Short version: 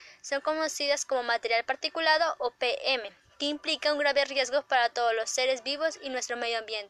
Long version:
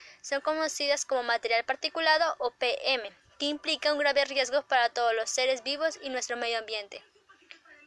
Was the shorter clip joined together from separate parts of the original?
no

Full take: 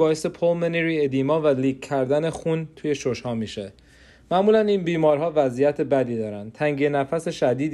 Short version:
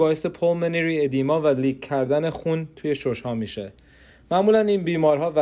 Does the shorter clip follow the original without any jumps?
yes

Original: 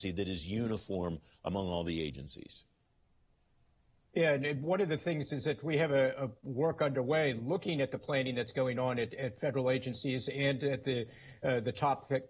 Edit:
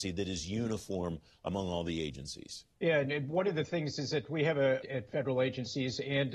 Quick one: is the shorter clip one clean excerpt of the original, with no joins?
no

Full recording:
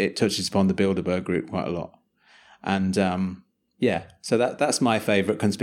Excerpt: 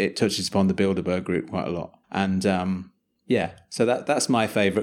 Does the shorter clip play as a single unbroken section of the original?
no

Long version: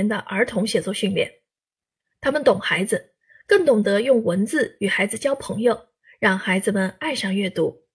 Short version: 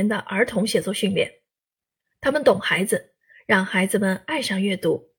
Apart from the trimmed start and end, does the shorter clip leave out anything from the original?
yes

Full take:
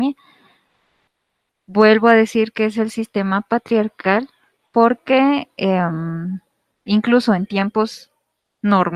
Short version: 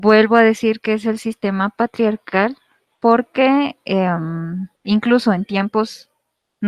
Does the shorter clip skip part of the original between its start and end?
yes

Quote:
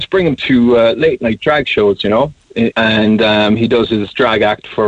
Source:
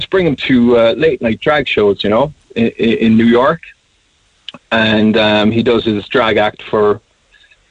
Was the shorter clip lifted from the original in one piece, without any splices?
no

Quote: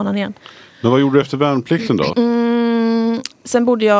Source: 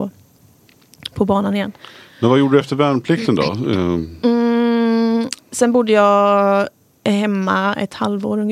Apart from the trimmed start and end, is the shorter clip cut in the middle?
yes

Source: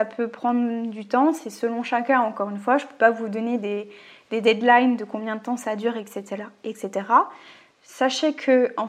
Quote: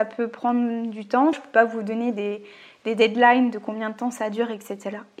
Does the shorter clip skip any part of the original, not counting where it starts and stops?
yes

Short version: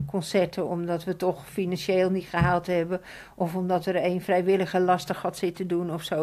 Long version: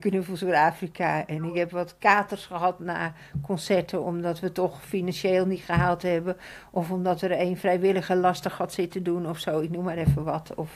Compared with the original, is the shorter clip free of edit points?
yes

